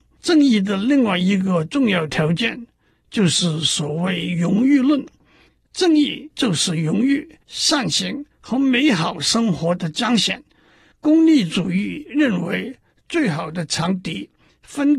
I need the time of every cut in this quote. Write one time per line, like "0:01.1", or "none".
0:10.9